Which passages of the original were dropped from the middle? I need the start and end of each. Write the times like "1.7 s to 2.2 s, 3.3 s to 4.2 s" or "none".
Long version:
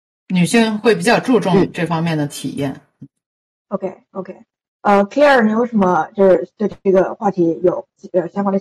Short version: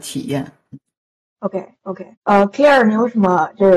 4.4 s to 4.7 s